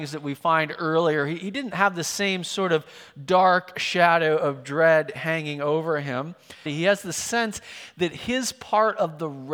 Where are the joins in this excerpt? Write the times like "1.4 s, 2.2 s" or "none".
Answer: 6.7 s

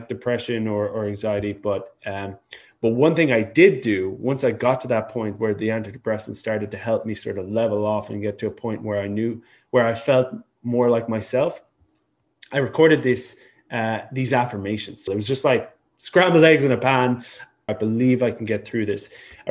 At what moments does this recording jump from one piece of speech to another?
15.1 s, 17.7 s

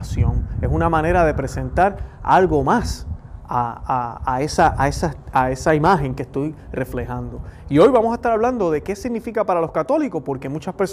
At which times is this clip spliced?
none

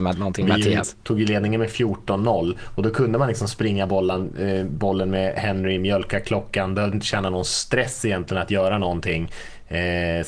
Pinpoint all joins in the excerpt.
1.0 s

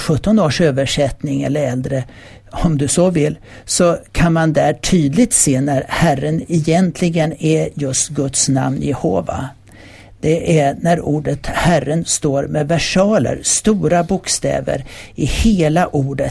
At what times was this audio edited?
none

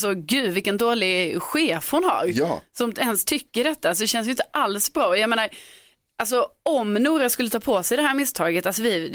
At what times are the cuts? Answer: none

